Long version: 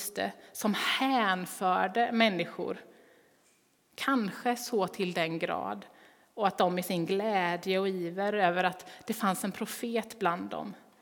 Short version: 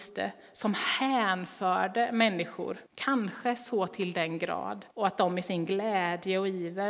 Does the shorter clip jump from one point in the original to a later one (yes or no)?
yes